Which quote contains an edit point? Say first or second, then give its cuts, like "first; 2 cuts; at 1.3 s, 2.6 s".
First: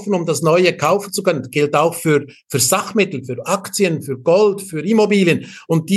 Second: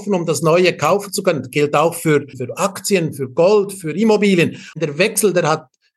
second; 2 cuts; at 2.3 s, 4.7 s